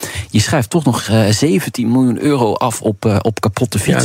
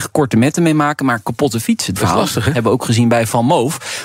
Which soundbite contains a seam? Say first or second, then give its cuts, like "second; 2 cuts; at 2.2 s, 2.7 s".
second; 1 cut; at 2.0 s